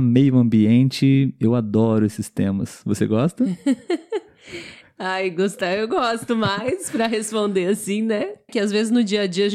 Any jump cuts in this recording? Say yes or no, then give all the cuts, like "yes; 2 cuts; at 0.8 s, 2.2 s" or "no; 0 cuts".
yes; 1 cut; at 8.5 s